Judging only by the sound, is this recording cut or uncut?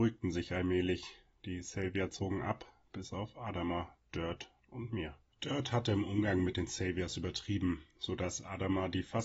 uncut